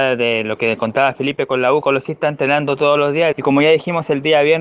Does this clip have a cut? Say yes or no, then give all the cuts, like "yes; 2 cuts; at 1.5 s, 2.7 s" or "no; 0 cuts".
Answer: yes; 2 cuts; at 1.8 s, 3.3 s